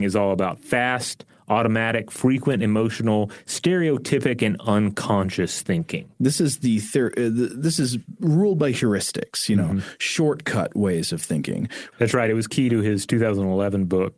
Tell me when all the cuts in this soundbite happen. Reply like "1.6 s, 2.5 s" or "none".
11.9 s